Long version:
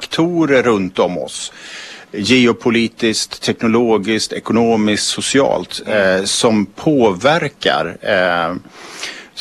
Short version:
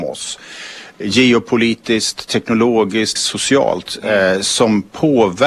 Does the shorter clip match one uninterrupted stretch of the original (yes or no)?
no